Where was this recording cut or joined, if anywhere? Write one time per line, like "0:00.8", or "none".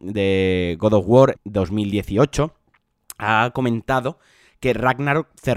0:01.4